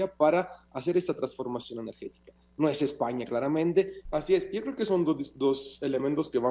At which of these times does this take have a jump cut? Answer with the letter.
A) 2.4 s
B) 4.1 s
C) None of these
B